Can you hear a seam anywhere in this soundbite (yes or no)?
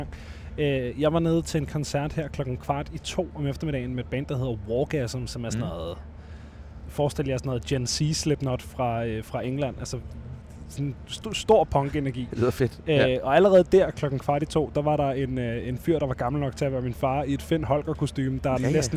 no